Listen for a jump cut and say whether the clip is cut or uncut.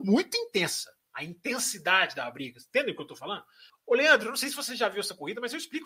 cut